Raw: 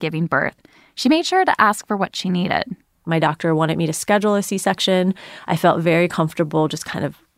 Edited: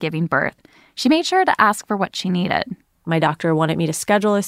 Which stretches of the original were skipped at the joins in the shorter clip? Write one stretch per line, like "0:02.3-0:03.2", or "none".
none